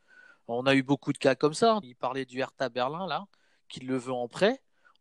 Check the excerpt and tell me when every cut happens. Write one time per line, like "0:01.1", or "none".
0:01.8